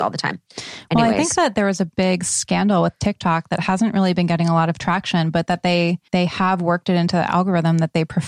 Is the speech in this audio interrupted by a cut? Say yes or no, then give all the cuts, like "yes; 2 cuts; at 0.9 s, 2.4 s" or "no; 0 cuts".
yes; 1 cut; at 6.1 s